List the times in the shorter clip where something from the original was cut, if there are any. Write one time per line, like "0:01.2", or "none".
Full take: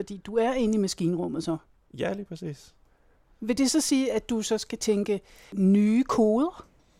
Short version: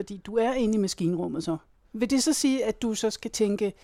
0:01.8